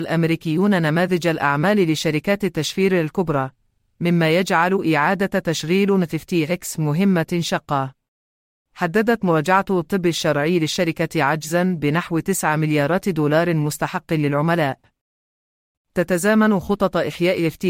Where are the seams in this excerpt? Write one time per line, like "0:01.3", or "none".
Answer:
0:08.6
0:15.8